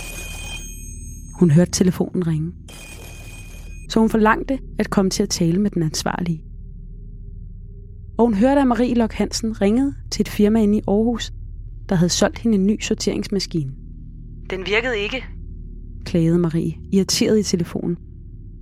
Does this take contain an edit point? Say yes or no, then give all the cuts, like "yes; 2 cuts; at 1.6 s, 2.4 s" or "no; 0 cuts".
yes; 2 cuts; at 3.9 s, 8.2 s